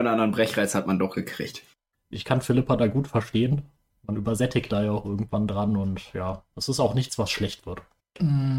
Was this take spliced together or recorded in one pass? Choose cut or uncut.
uncut